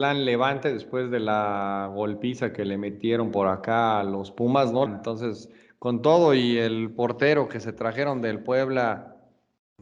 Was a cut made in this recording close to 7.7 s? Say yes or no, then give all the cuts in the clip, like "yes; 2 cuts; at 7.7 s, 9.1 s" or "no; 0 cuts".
no; 1 cut; at 4.9 s